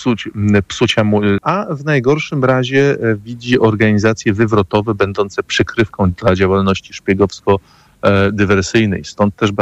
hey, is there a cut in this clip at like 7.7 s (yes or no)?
no